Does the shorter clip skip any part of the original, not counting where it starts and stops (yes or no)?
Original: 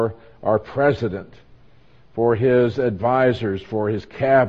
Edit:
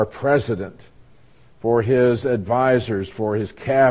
no